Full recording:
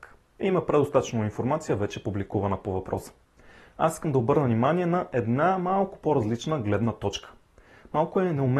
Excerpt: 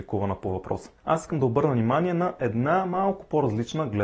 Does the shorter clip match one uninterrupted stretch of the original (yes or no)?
no